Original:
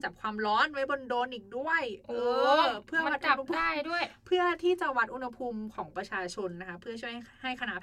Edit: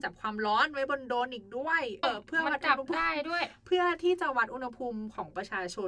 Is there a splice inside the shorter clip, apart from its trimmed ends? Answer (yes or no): yes